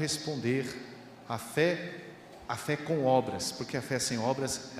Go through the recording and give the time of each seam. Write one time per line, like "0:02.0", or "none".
0:01.2